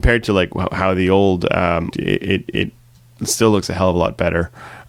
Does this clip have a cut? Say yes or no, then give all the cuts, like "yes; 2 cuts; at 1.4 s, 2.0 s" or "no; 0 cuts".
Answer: yes; 1 cut; at 1.9 s